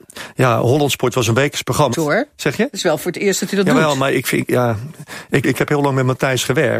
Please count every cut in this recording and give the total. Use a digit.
2